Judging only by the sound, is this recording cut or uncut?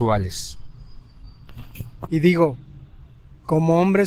cut